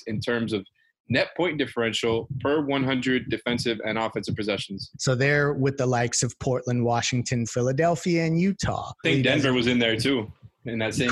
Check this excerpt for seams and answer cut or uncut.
cut